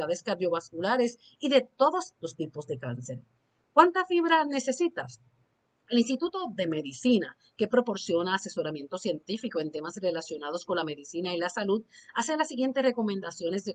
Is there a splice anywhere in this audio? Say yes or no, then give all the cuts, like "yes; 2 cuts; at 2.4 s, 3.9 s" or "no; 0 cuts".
no; 0 cuts